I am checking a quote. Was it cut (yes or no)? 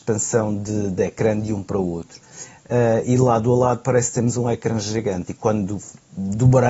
no